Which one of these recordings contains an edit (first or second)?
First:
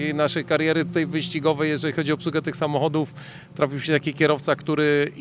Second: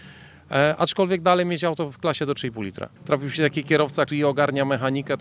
second